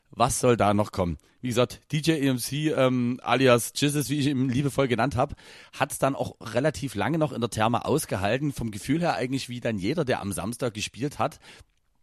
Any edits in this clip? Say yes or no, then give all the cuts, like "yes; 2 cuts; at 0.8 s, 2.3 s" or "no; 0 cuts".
no; 0 cuts